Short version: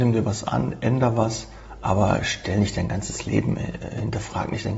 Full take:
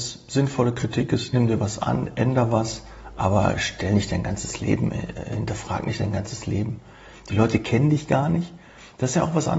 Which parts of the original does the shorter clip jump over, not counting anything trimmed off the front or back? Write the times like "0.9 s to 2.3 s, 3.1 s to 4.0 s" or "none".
none